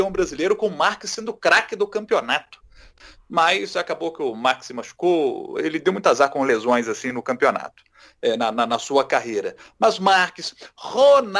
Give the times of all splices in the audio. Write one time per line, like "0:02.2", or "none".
none